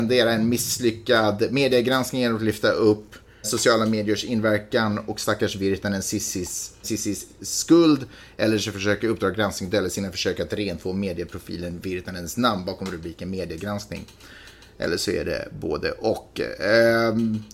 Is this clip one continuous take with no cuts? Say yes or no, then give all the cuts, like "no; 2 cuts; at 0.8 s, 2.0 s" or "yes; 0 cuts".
no; 2 cuts; at 3.4 s, 6.8 s